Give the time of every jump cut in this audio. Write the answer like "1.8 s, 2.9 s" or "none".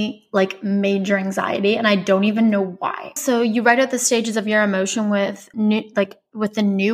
3.2 s, 5.5 s